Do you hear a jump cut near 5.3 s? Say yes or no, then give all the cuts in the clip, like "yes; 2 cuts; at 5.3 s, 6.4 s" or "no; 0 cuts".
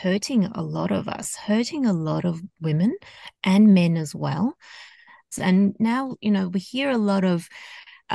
yes; 1 cut; at 5.3 s